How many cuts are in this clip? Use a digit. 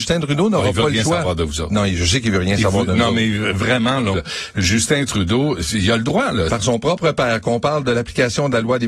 2